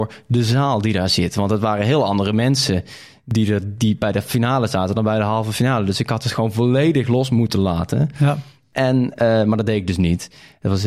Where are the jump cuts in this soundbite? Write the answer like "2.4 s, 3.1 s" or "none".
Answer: none